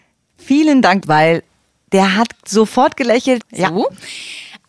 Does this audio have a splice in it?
yes; 2 cuts; at 1.0 s, 3.4 s

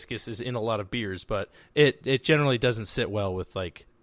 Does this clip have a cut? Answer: no; 0 cuts

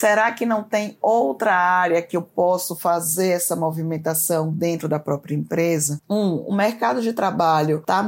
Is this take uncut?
no; 1 cut; at 6.0 s

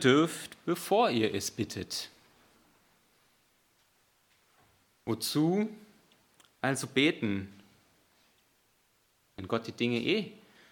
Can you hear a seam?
no; 0 cuts

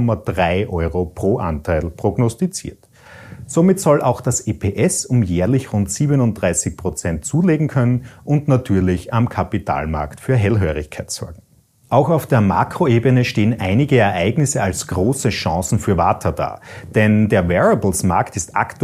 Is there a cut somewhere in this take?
no; 0 cuts

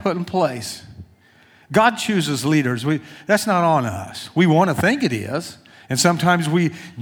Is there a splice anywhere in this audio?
no; 0 cuts

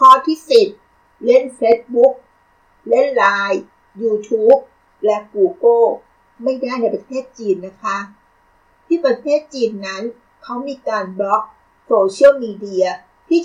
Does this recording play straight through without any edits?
yes; 0 cuts

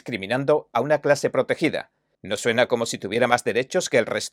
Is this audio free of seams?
no; 1 cut; at 2.1 s

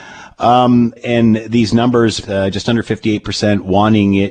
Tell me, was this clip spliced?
yes; 2 cuts; at 1.0 s, 2.2 s

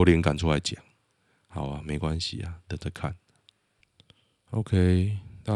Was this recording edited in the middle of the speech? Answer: no; 0 cuts

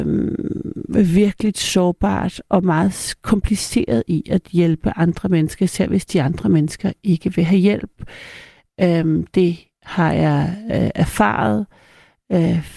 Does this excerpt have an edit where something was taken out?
no; 0 cuts

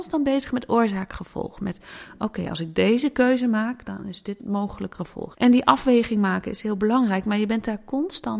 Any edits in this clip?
yes; 1 cut; at 5.3 s

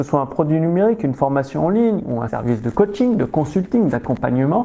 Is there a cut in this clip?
yes; 1 cut; at 2.3 s

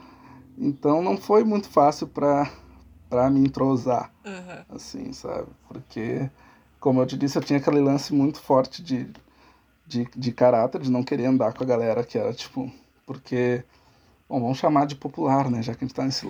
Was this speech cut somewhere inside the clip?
no; 0 cuts

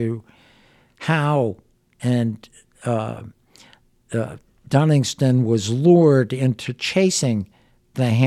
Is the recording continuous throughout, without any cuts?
yes; 0 cuts

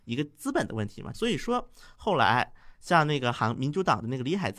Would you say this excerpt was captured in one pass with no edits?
no; 1 cut; at 1.1 s

